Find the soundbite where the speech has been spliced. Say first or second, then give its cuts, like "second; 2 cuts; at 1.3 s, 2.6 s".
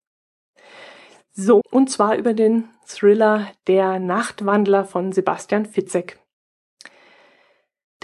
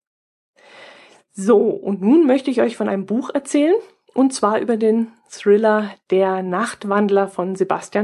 first; 1 cut; at 1.6 s